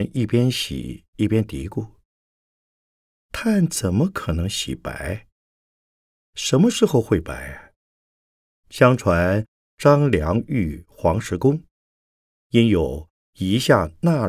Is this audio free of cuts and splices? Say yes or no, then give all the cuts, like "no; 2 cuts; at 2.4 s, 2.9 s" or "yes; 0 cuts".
no; 1 cut; at 8.5 s